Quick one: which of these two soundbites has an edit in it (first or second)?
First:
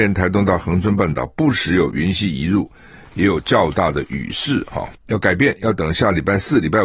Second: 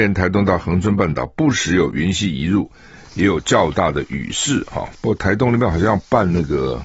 first